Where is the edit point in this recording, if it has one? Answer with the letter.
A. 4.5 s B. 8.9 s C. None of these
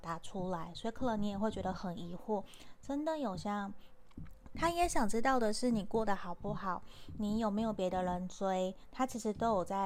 A